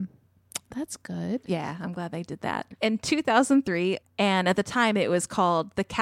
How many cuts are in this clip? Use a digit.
1